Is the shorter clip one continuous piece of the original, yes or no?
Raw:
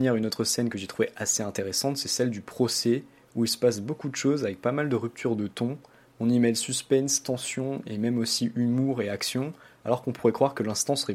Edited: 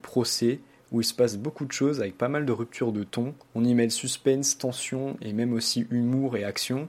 no